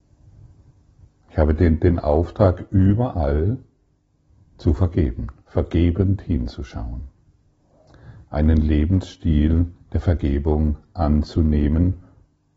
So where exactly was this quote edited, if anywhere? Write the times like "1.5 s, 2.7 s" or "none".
8.3 s